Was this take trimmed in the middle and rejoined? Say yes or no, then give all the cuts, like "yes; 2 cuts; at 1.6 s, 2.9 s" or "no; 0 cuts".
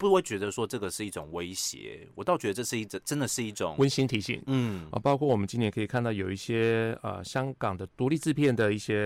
yes; 1 cut; at 4.4 s